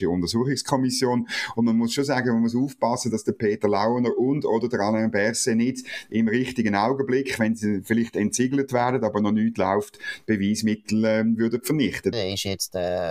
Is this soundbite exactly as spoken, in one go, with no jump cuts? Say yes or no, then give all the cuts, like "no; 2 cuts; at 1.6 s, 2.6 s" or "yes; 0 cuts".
no; 1 cut; at 12.1 s